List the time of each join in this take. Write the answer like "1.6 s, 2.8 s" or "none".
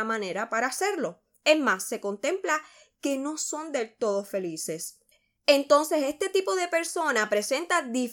none